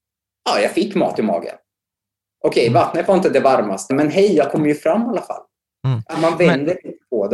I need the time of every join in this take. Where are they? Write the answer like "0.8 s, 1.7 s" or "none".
3.9 s